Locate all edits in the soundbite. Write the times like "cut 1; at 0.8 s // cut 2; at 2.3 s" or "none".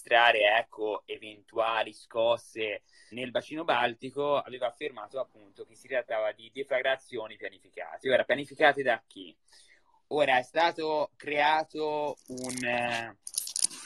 cut 1; at 3.1 s